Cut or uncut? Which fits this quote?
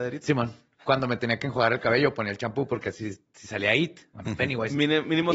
uncut